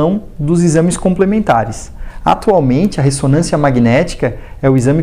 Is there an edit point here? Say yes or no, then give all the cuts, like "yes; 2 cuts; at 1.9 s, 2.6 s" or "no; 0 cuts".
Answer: no; 0 cuts